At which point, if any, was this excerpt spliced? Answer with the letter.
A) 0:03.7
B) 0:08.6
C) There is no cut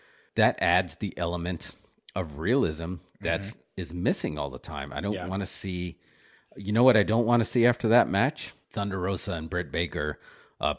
B